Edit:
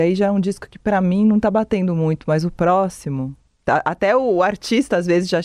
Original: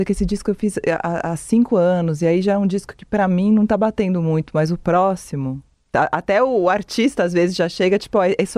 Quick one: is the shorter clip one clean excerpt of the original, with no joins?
yes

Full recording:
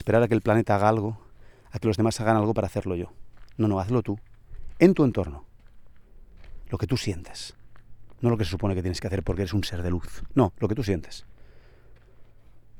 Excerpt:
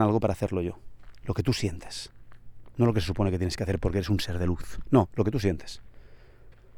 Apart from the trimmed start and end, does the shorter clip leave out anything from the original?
yes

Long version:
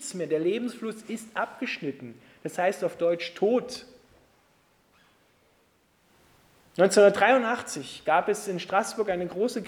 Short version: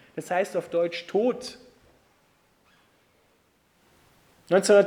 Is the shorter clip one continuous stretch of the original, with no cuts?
yes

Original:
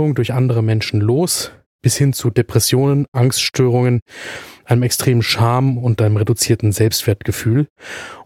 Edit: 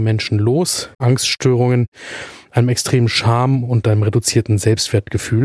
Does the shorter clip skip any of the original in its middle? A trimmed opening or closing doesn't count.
yes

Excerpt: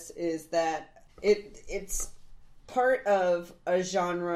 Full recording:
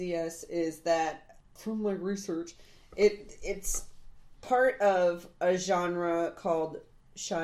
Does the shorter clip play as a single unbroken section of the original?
no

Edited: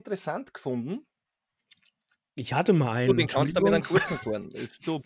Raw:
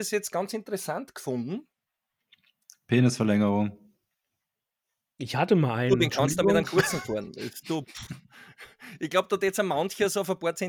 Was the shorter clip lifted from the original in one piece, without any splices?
no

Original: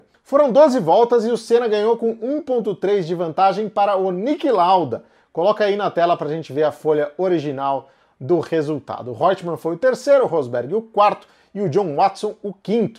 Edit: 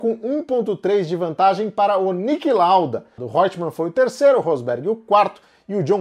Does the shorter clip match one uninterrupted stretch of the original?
no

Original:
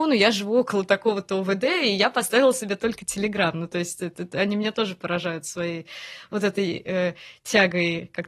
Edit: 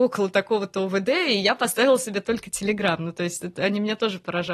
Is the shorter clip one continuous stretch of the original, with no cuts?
no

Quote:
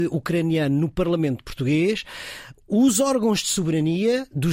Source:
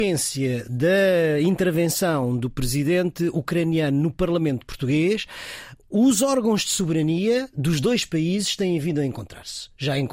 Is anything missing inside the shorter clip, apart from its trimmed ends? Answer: no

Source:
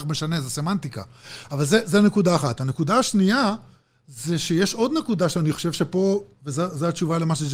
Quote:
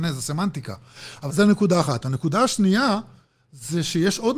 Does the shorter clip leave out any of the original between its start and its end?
yes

